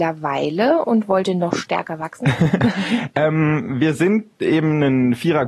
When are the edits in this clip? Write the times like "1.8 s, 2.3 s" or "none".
none